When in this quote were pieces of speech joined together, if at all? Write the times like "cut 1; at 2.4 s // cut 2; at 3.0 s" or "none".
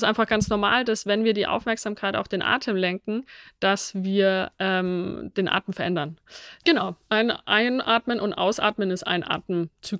cut 1; at 6.6 s